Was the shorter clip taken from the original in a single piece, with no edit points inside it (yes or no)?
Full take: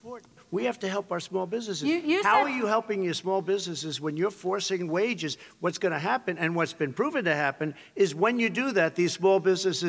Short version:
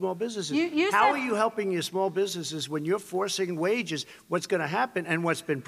yes